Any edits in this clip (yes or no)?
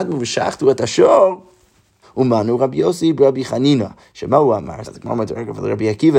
yes